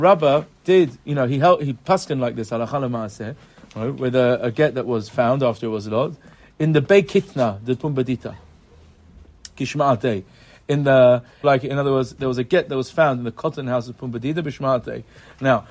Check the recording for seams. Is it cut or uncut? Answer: cut